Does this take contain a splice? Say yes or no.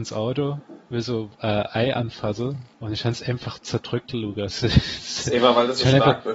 yes